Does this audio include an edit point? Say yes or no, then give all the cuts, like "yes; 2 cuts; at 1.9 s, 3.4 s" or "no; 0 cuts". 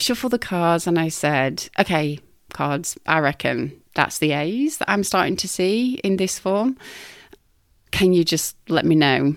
no; 0 cuts